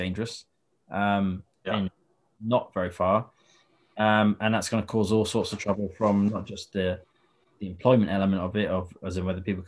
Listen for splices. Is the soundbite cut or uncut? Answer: uncut